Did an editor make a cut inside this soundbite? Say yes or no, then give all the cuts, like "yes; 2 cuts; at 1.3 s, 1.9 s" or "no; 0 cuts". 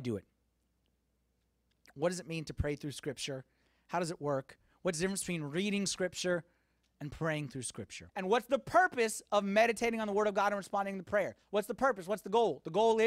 yes; 1 cut; at 8.1 s